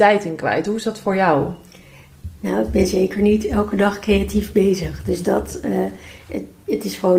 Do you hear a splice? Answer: no; 0 cuts

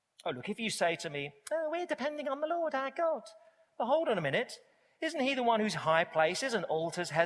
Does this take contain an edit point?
no; 0 cuts

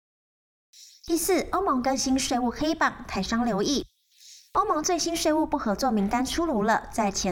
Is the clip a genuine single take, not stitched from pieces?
yes; 0 cuts

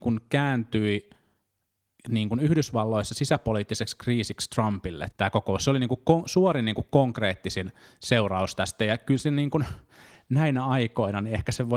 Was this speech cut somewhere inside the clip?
yes; 1 cut; at 5.1 s

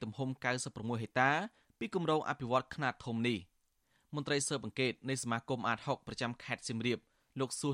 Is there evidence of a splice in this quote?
no; 0 cuts

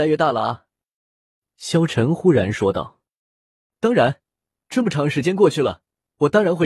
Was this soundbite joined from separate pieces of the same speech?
no; 0 cuts

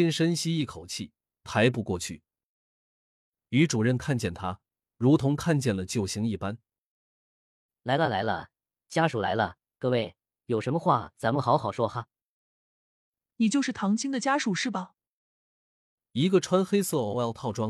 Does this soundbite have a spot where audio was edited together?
no; 0 cuts

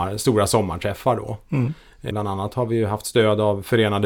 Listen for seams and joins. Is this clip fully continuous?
no; 1 cut; at 2.1 s

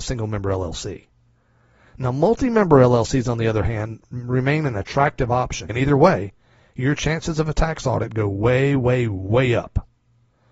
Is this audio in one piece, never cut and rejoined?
no; 1 cut; at 5.7 s

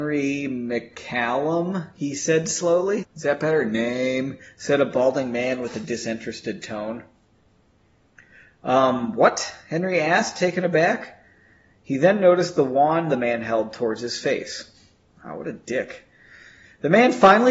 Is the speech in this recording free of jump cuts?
no; 1 cut; at 3.0 s

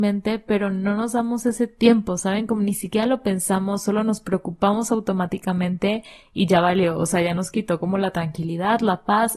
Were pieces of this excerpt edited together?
no; 0 cuts

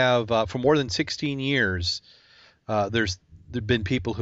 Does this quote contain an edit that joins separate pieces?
no; 0 cuts

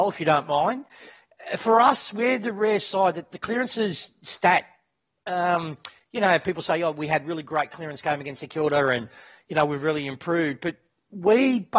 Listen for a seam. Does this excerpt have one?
no; 0 cuts

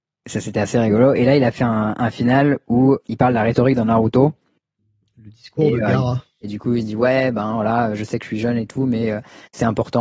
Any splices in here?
yes; 2 cuts; at 3.0 s, 6.4 s

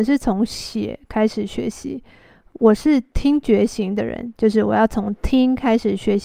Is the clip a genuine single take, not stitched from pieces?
yes; 0 cuts

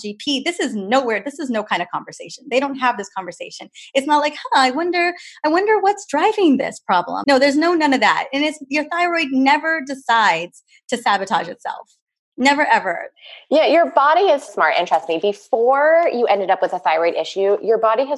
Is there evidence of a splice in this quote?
yes; 2 cuts; at 7.2 s, 14.5 s

